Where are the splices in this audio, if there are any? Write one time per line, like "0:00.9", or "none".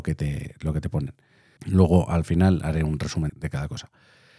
0:01.6
0:03.3